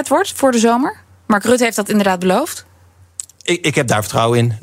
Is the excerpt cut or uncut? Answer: uncut